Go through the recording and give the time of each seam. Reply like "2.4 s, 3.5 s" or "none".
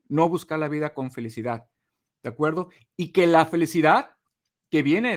none